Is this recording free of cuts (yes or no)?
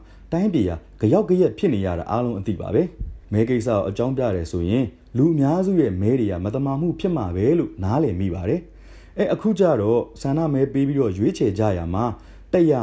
no